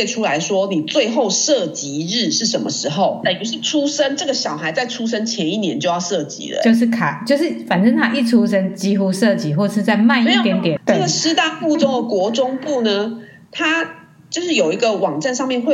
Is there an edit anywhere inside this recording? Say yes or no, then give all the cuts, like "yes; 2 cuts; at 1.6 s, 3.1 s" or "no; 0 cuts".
yes; 2 cuts; at 3.2 s, 10.8 s